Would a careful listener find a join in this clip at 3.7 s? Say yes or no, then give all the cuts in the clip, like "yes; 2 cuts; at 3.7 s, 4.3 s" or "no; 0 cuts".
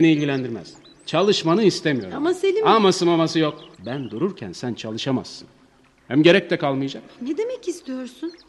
yes; 1 cut; at 3.7 s